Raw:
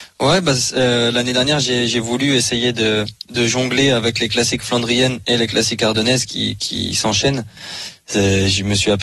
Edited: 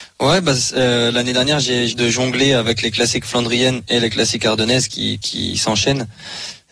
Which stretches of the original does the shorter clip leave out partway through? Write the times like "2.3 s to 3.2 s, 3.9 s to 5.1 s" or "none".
1.9 s to 3.3 s